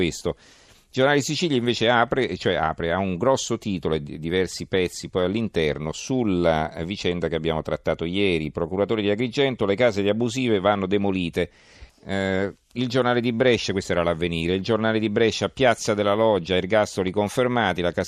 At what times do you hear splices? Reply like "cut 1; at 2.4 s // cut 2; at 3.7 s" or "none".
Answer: cut 1; at 11.9 s